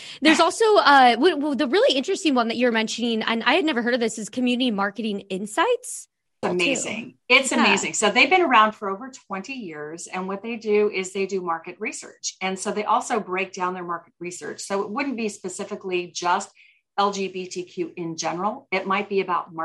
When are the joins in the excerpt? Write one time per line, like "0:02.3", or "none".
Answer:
0:06.4

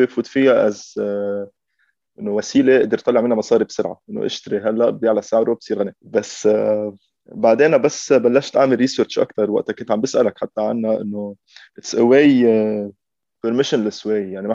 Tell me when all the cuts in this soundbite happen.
0:06.0

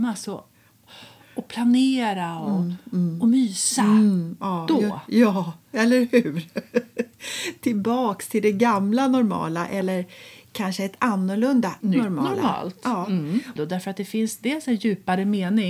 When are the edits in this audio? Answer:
0:11.8
0:13.6

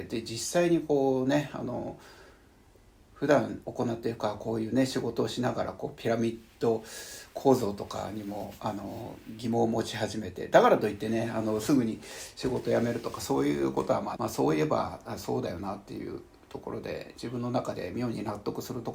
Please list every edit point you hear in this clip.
0:03.6
0:14.1

